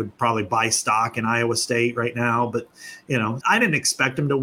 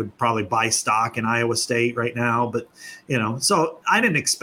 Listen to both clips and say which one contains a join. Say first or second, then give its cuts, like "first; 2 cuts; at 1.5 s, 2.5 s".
first; 1 cut; at 3.4 s